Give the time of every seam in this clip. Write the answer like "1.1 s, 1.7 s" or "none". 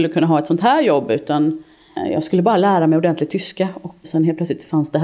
4.0 s